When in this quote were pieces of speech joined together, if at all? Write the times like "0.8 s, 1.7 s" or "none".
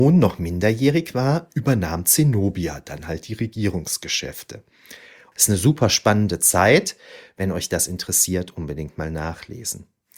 5.3 s